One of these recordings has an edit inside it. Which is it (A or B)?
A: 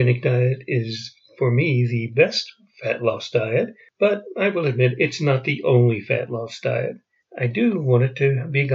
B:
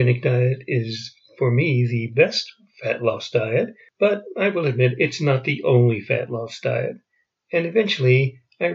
A